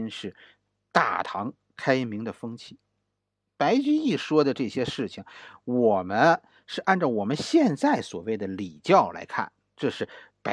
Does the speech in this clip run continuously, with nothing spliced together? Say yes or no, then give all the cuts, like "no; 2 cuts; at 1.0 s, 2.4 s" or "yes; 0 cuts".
yes; 0 cuts